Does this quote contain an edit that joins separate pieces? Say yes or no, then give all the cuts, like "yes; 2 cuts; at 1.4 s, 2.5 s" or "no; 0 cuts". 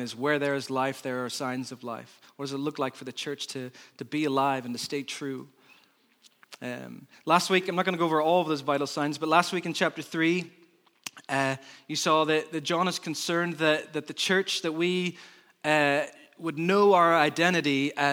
no; 0 cuts